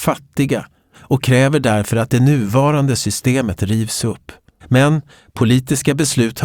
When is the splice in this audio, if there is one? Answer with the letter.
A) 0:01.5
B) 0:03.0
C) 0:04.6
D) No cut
C